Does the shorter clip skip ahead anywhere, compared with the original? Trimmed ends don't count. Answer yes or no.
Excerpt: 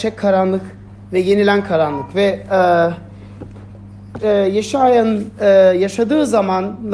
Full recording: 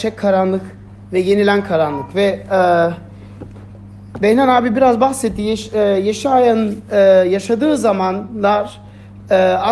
yes